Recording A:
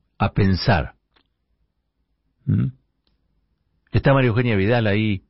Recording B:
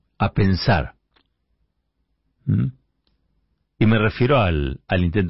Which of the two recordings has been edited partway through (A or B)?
B